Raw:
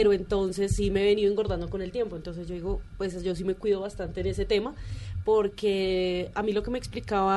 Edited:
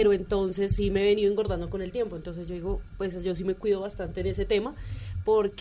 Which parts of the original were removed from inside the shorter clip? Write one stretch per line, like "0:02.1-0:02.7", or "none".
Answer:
none